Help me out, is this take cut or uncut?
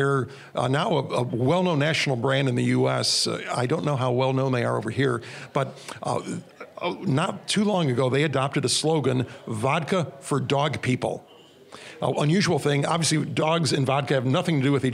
cut